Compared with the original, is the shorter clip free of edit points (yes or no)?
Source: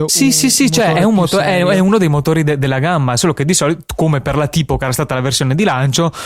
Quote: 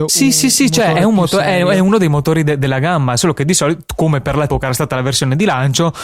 no